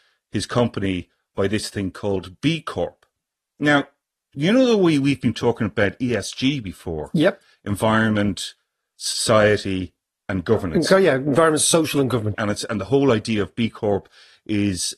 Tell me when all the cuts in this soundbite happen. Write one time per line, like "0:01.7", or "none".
0:12.3

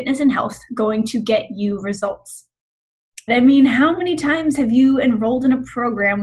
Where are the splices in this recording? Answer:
0:03.3

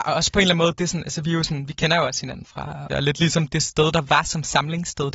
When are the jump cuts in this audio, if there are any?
0:02.9

